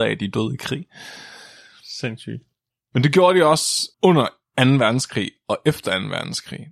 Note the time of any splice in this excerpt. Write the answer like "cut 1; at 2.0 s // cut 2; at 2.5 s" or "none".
cut 1; at 3.9 s